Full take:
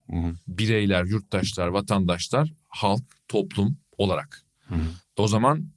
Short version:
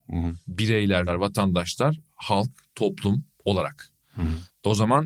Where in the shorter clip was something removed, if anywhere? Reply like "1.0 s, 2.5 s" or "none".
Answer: 1.1 s